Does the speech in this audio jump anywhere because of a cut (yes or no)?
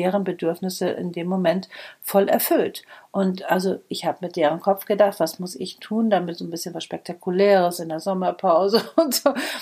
no